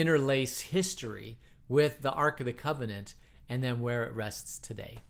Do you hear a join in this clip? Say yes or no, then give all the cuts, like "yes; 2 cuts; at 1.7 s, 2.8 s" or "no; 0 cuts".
no; 0 cuts